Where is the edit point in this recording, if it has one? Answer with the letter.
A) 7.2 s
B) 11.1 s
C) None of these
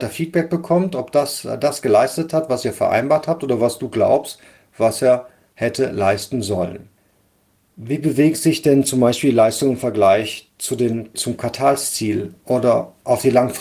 B